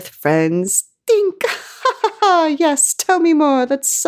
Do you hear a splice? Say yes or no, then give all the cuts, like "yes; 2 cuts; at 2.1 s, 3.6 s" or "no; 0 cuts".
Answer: no; 0 cuts